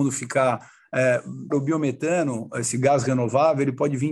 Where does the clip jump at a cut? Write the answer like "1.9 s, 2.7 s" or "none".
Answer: 1.5 s